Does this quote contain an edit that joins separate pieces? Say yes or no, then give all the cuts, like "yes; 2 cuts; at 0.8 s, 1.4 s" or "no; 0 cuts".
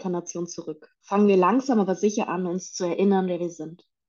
yes; 1 cut; at 1.0 s